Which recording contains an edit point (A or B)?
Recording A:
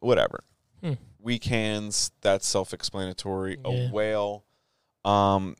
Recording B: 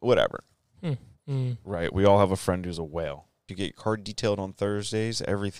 B